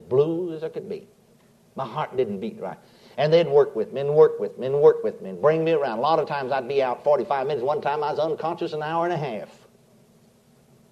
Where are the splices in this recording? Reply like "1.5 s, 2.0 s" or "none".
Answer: none